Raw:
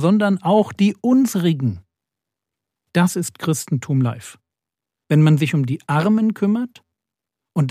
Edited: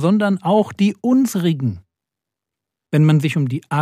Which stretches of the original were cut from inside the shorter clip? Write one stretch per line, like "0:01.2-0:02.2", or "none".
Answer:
0:02.8-0:04.9